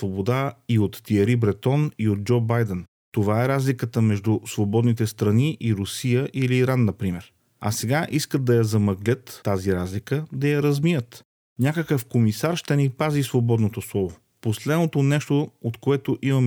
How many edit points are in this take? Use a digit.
0